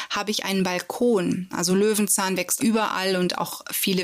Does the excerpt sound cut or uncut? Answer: cut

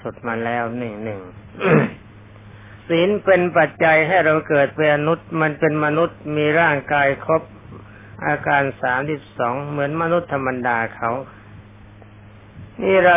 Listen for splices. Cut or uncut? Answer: cut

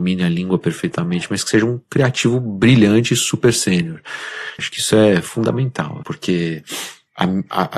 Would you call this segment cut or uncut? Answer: cut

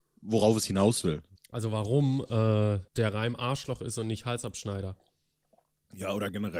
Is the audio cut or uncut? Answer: cut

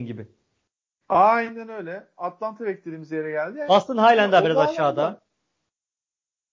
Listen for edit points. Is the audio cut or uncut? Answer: cut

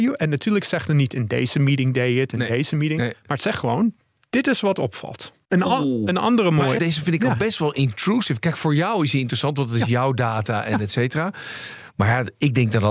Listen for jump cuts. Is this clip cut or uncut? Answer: cut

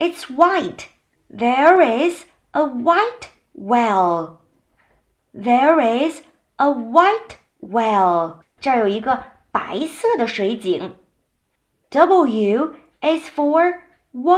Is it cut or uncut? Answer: uncut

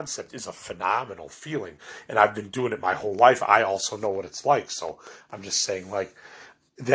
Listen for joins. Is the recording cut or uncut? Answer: uncut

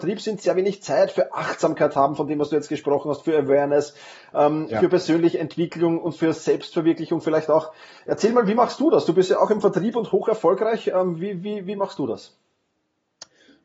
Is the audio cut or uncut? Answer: uncut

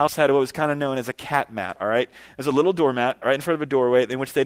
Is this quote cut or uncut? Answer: uncut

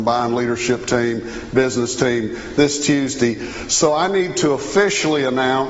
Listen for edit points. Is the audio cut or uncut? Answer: uncut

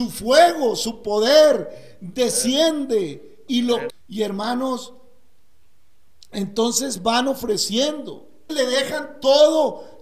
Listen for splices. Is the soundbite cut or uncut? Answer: cut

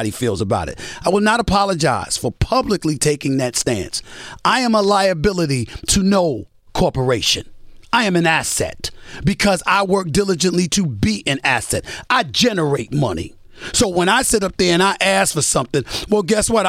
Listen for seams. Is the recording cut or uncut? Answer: uncut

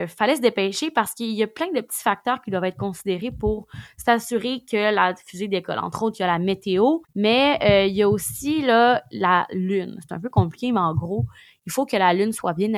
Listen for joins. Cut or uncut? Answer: cut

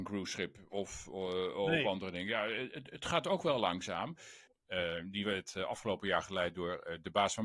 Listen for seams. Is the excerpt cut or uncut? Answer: cut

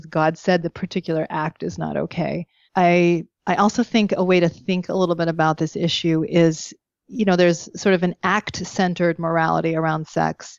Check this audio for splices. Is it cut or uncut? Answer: cut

